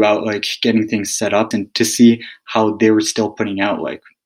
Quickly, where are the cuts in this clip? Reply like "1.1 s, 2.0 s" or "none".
1.5 s

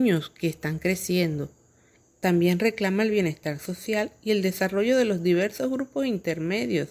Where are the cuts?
2.0 s

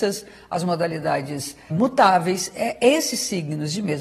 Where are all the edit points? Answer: 1.7 s

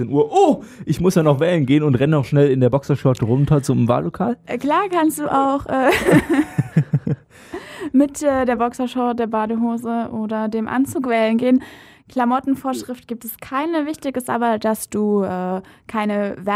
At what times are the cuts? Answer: none

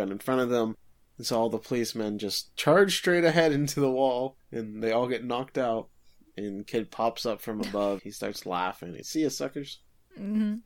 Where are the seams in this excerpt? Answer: 8.0 s, 9.0 s

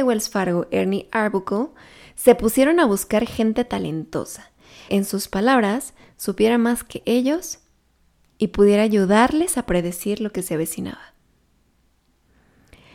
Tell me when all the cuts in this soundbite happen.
4.9 s

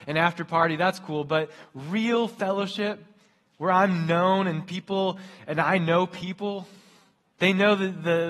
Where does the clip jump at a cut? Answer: none

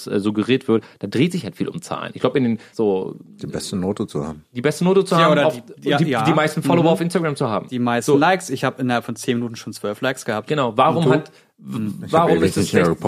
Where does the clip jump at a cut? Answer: 2.7 s

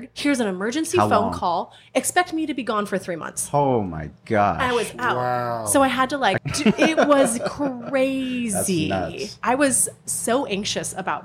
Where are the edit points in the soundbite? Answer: 6.4 s

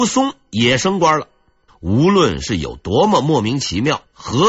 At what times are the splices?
1.7 s

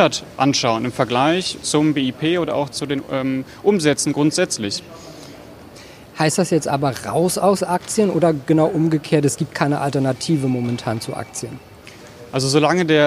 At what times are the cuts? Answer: none

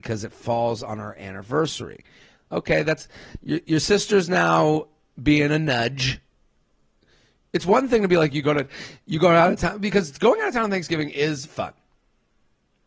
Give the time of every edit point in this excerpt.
none

